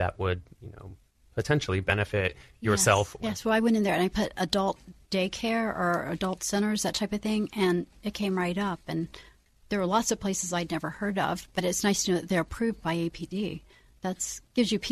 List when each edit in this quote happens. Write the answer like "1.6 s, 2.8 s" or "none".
3.2 s